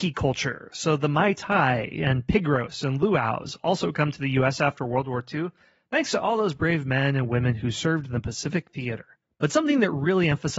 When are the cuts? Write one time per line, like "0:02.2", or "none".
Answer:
none